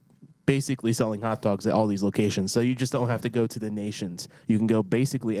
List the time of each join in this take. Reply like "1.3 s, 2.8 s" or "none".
none